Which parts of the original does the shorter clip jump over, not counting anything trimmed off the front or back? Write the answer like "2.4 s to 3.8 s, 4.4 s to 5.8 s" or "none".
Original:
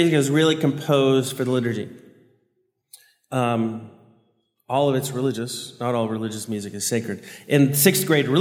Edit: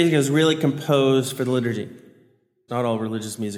2.7 s to 5.8 s

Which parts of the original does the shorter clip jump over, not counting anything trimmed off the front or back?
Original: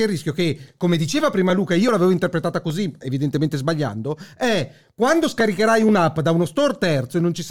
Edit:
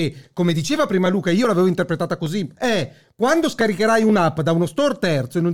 3.0 s to 4.3 s

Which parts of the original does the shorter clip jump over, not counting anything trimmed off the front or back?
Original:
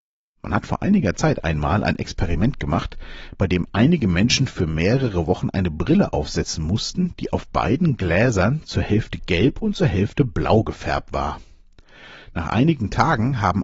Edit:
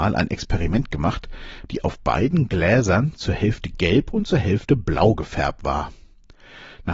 3.4 s to 7.2 s

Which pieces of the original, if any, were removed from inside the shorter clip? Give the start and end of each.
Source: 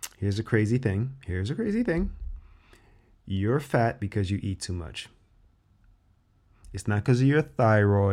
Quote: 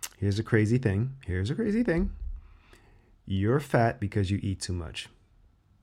none

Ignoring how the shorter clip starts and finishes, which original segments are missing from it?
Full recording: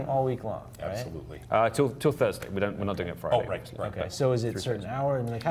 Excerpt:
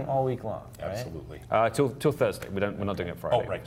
none

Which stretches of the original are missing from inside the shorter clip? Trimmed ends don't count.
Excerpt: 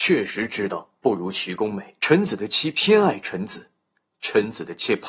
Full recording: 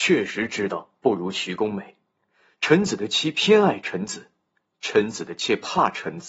2.0 s to 2.6 s

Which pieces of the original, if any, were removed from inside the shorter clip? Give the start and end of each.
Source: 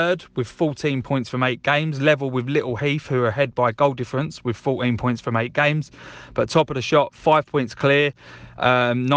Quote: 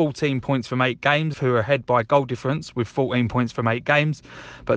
1.9 s to 3.0 s

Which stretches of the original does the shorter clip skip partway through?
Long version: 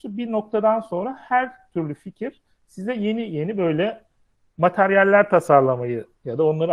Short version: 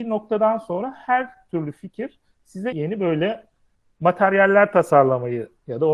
2.9 s to 3.3 s

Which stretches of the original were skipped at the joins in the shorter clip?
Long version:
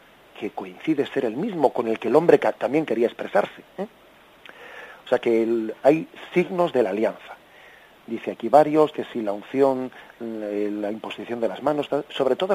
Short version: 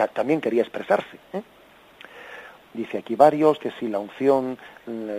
5.0 s to 7.9 s

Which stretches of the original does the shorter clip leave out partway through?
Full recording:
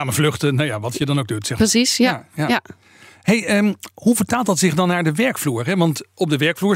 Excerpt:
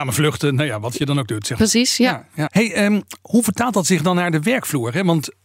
2.5 s to 3.2 s

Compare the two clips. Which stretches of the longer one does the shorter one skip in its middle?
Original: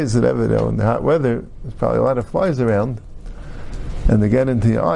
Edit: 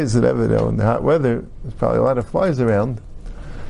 none

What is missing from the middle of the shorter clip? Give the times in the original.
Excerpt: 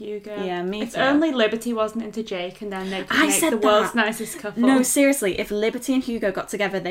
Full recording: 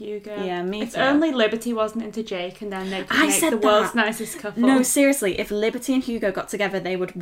none

